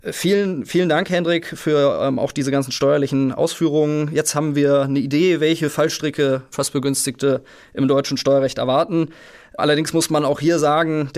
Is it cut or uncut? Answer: uncut